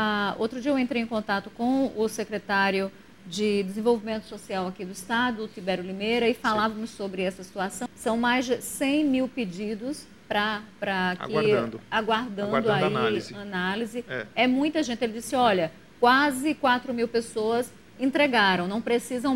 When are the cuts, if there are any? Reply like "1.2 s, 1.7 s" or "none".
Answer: 7.9 s